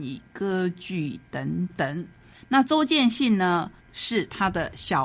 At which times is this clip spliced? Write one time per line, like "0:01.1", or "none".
0:02.3
0:03.8